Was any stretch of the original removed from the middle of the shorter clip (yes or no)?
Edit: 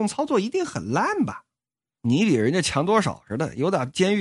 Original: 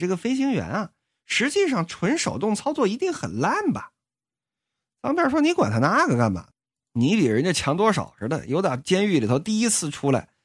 yes